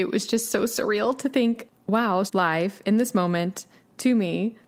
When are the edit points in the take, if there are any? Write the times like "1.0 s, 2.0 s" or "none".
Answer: 2.3 s